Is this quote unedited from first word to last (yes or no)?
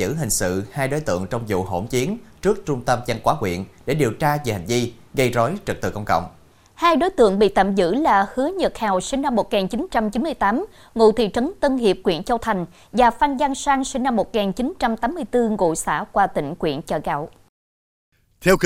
yes